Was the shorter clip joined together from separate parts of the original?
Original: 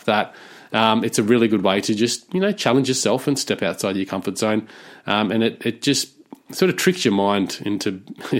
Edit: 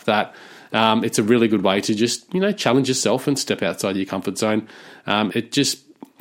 yes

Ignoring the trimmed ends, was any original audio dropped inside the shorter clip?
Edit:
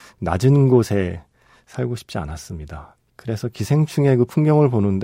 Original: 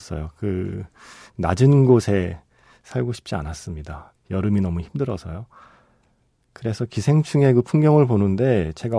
yes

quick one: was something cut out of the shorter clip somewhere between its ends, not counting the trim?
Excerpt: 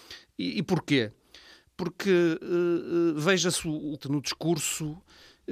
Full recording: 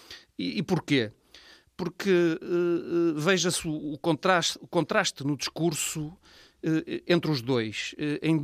yes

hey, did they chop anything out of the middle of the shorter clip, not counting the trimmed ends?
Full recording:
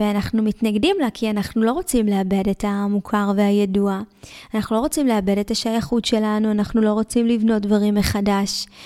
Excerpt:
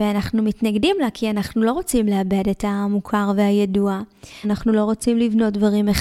yes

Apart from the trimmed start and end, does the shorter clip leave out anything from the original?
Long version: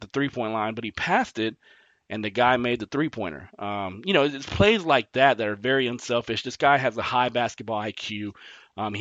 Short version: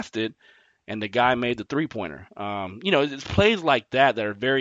no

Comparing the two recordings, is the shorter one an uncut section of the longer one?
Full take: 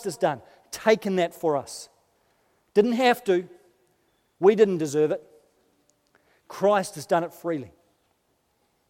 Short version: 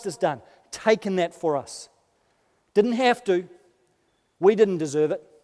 yes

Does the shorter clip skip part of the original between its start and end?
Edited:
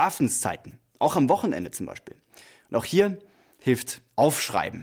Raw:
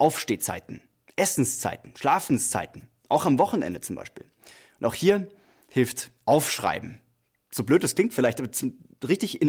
no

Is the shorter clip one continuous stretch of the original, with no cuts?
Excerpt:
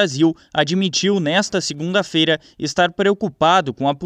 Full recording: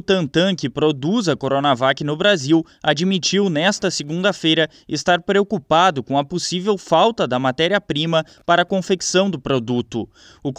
yes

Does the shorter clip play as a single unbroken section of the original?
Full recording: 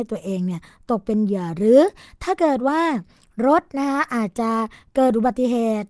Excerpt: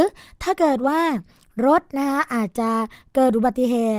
yes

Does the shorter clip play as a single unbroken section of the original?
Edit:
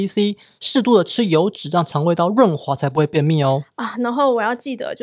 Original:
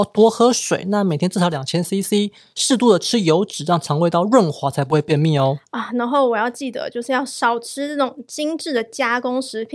yes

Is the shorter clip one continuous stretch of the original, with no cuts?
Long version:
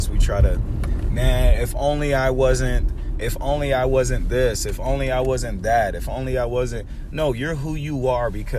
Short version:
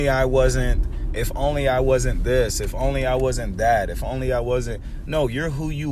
yes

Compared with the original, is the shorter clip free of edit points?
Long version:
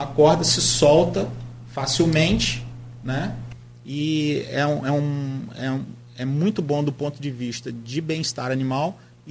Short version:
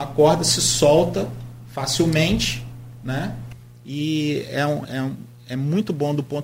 no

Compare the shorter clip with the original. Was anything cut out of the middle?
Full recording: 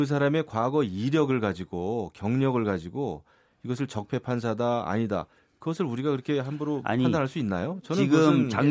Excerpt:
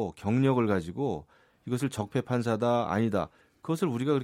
no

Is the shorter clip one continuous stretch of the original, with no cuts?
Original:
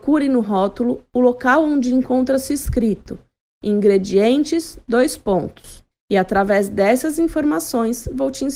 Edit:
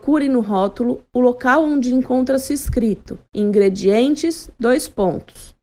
no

